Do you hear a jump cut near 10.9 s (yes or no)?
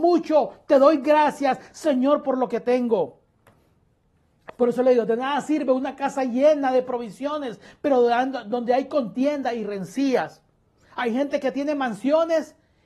no